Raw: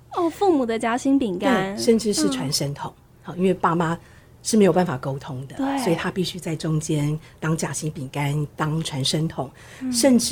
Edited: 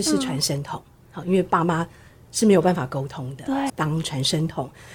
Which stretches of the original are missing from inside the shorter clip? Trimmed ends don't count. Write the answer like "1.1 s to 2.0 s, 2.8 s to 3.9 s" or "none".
5.8 s to 8.5 s